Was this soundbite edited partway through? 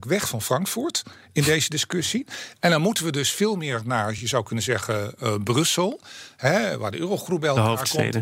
no; 0 cuts

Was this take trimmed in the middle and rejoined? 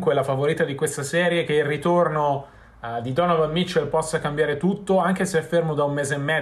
no; 0 cuts

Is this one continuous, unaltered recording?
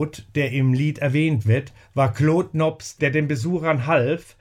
no; 1 cut; at 3.0 s

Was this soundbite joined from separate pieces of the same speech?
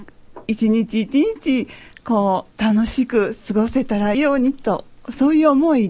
yes; 2 cuts; at 2.5 s, 4.1 s

